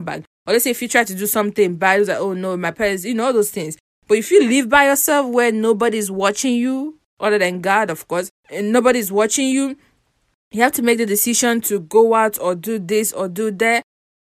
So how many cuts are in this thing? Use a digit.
1